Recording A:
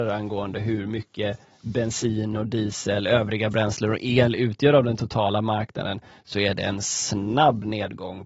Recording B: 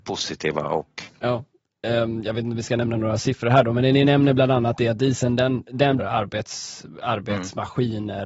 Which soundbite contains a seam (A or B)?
B